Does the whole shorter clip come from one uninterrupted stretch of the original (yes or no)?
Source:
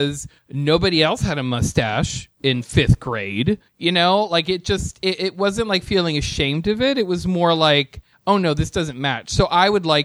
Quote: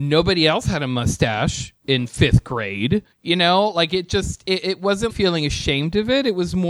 no